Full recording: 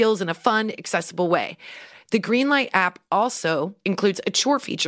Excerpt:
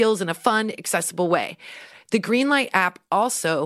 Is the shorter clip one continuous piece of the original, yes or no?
yes